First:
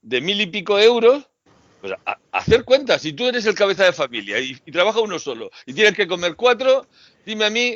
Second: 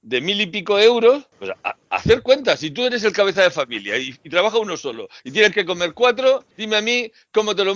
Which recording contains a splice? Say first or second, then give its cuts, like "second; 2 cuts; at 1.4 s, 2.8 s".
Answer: second; 2 cuts; at 1.3 s, 6.5 s